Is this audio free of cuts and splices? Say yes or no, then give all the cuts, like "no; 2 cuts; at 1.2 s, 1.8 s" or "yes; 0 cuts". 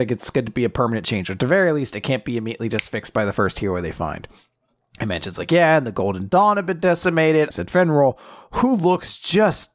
no; 1 cut; at 7.5 s